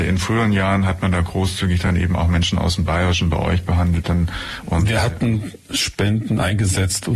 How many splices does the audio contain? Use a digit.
0